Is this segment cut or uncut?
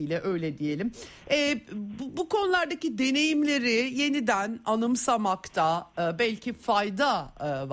uncut